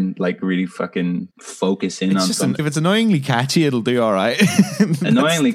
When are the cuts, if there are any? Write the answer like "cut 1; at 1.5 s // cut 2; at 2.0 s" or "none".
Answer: cut 1; at 1.3 s // cut 2; at 2.6 s

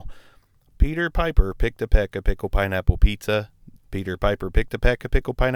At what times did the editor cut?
cut 1; at 3.8 s

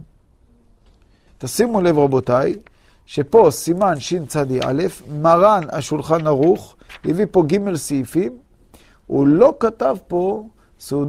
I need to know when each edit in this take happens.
cut 1; at 1.3 s

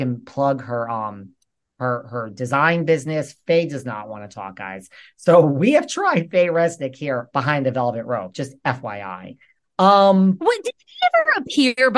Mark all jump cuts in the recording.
none

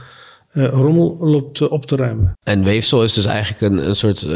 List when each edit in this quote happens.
cut 1; at 2.4 s

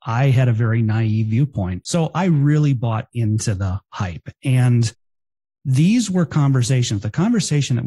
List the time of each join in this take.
cut 1; at 1.8 s

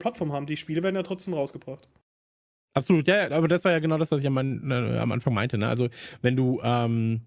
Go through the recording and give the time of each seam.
none

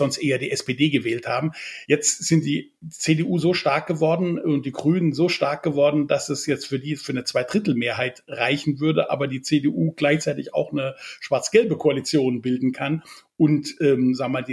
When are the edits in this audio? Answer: none

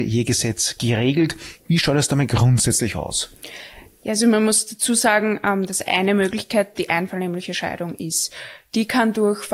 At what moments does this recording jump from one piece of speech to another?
cut 1; at 6.7 s

